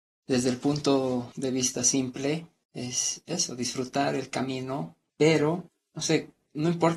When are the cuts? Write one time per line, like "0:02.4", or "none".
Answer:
none